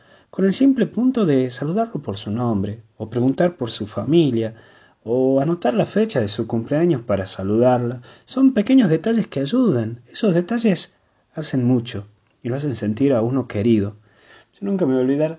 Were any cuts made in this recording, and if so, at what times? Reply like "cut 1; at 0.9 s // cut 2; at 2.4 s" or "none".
none